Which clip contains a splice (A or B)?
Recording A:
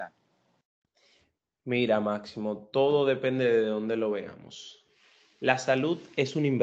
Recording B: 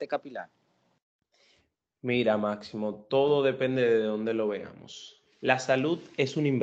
B